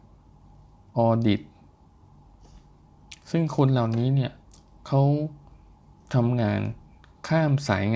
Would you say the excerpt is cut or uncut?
uncut